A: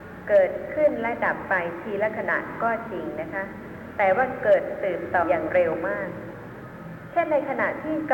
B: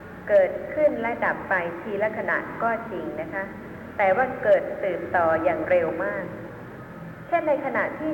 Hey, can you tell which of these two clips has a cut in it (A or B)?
A